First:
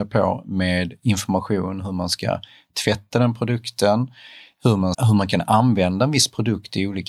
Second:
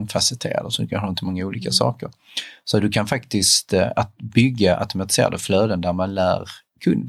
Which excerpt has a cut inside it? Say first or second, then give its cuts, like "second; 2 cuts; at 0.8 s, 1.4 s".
first; 1 cut; at 4.9 s